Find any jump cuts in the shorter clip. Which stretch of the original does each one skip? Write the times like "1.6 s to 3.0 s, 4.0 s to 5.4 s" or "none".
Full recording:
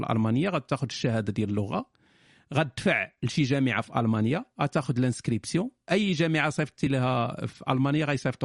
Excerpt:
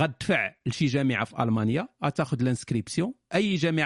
none